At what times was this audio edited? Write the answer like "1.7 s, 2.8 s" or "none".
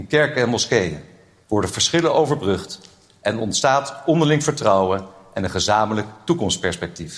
1.4 s